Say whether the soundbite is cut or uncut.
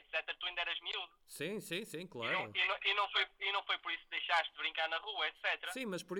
uncut